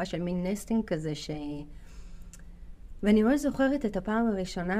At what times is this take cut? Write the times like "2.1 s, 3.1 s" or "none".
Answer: none